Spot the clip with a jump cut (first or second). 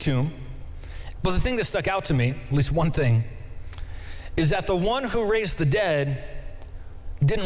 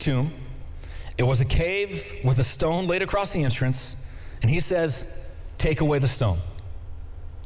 first